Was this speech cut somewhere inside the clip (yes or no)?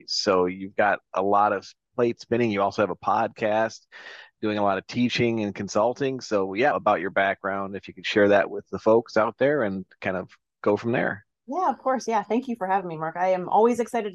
yes